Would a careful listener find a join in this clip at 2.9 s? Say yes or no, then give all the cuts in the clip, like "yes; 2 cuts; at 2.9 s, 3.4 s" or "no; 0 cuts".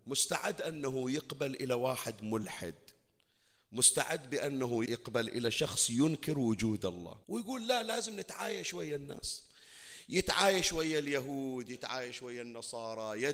no; 2 cuts; at 4.9 s, 7.2 s